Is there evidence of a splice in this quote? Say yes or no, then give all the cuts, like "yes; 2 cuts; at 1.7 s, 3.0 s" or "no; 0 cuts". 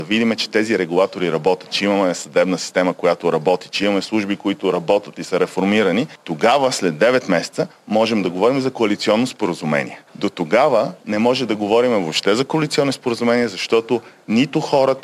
no; 0 cuts